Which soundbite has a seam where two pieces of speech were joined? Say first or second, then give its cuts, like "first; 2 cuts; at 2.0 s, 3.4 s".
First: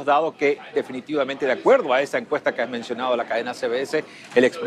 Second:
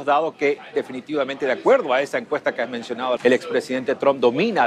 second; 1 cut; at 3.2 s